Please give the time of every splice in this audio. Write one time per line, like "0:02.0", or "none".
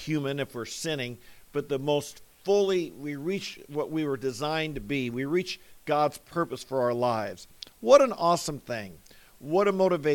none